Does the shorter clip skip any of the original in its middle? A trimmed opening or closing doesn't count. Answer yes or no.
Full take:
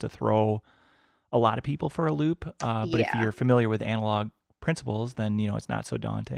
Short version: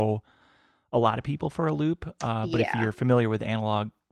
no